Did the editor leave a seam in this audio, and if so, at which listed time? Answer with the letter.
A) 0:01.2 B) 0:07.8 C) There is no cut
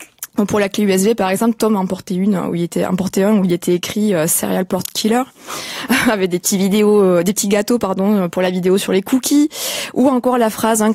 C